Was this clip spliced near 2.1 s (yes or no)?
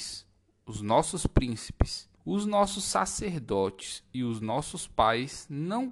yes